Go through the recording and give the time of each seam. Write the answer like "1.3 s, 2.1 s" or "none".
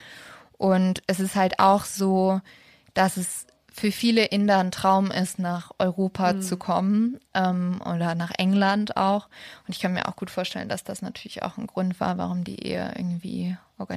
none

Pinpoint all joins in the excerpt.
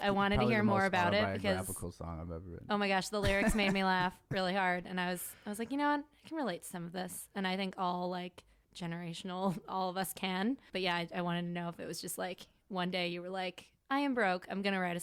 none

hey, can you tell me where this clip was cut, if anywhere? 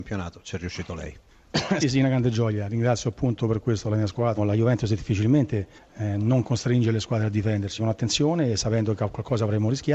1.8 s, 4.4 s, 7.8 s

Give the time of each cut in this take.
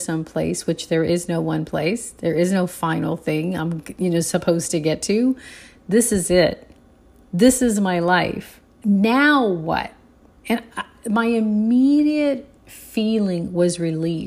none

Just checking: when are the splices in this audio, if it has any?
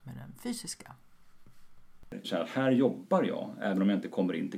2.2 s

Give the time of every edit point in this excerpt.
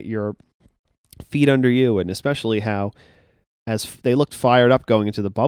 none

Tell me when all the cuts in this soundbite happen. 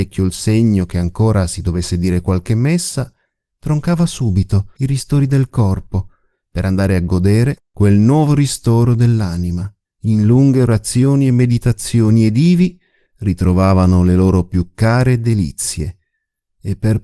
4.8 s, 7.6 s, 9.8 s

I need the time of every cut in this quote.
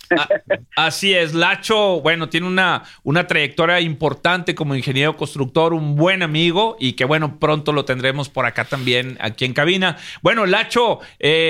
none

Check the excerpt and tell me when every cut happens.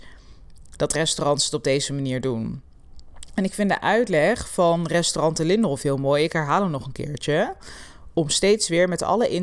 none

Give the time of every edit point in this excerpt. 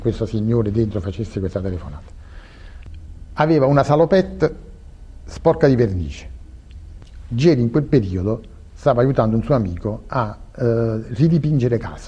none

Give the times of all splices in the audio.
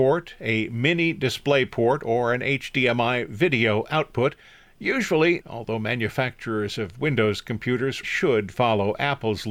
5.4 s, 8.0 s

